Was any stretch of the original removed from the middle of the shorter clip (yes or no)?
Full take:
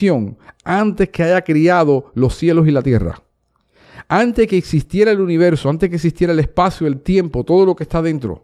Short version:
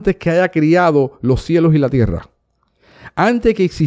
no